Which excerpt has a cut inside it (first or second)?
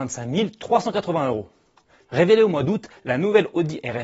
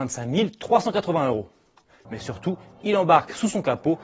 second